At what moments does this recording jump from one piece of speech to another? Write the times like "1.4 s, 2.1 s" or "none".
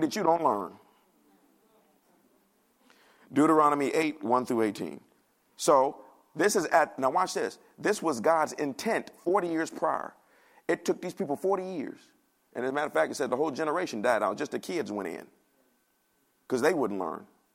none